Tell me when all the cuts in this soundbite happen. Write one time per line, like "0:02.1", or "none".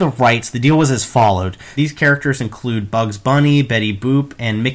0:01.8